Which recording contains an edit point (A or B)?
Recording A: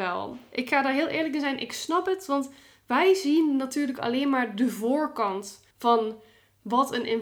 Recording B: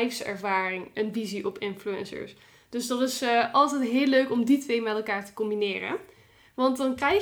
A